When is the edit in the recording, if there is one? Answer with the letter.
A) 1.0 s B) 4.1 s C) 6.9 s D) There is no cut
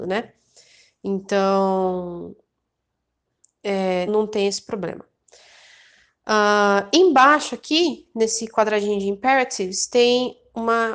B